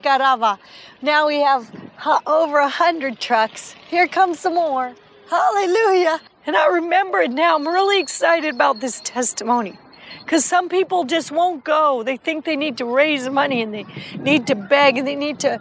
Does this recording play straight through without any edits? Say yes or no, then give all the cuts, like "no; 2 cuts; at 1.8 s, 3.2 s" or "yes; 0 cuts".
no; 1 cut; at 6.3 s